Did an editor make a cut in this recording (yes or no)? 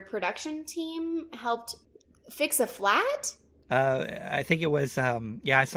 no